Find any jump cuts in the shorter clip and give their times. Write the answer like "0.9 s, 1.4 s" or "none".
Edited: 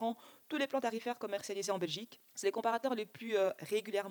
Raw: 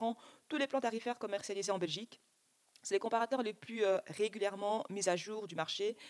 2.3 s